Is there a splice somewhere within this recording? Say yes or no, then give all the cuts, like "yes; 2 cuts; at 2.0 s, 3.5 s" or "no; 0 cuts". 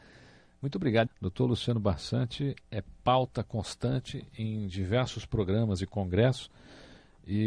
yes; 1 cut; at 1.1 s